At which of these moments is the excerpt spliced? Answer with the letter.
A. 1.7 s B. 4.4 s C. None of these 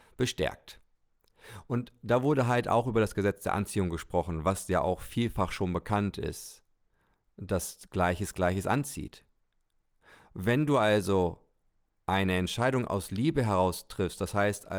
C